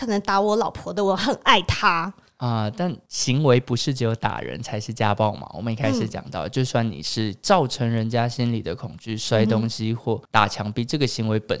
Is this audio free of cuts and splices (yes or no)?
yes